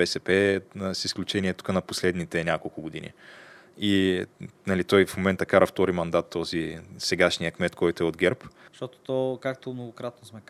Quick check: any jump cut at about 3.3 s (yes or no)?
no